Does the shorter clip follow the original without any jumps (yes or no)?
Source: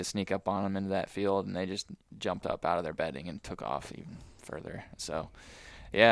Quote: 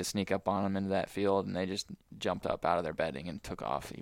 yes